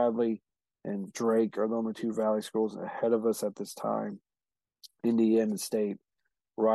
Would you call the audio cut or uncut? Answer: uncut